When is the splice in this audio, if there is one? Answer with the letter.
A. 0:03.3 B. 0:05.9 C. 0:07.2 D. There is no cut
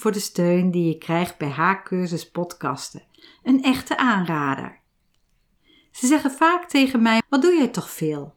C